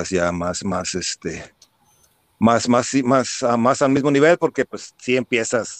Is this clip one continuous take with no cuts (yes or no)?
yes